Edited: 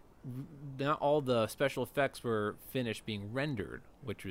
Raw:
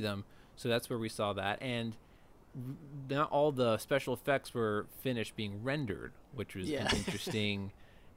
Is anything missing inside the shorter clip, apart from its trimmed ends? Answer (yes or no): no